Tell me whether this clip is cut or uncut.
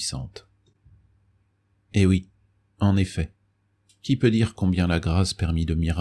uncut